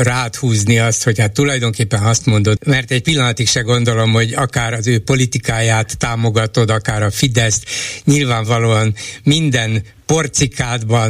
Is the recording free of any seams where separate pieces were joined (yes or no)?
no